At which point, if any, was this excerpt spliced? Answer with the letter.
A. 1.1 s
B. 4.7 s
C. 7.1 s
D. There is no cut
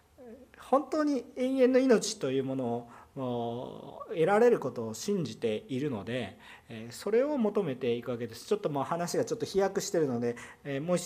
D